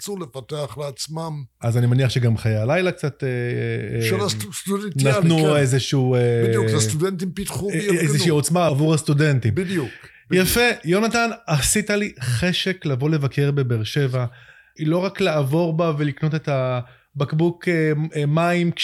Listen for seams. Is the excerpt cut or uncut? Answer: cut